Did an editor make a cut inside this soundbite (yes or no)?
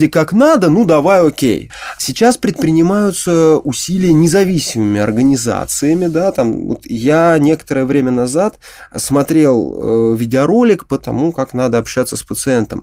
no